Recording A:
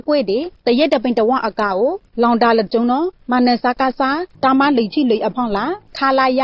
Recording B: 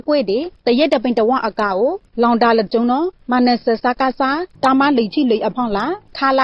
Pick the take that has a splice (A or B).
A